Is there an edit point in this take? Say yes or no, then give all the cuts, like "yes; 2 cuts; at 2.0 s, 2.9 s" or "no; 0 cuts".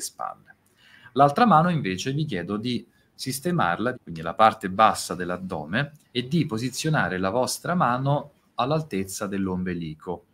yes; 2 cuts; at 3.9 s, 6.0 s